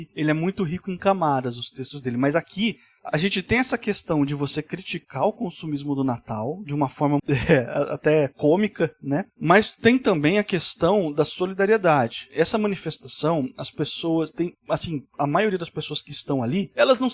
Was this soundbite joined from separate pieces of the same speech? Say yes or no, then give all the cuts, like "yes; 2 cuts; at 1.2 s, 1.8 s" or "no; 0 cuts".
yes; 1 cut; at 7.2 s